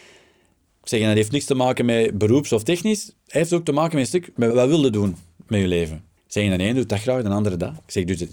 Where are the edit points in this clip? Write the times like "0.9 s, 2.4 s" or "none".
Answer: 4.5 s, 6.2 s